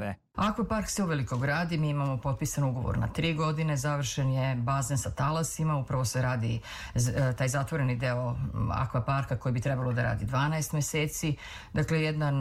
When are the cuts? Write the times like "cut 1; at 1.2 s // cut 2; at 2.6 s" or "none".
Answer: none